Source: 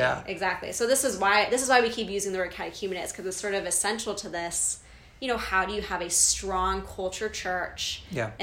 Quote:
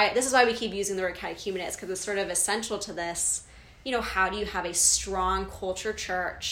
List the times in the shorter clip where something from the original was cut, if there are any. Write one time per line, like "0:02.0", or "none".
none